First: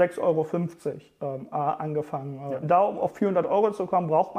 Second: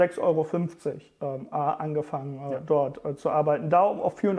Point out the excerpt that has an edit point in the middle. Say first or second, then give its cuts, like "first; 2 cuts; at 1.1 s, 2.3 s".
first; 1 cut; at 2.6 s